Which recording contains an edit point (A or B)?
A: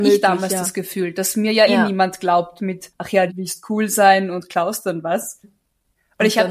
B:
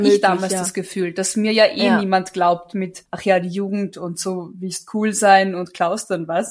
A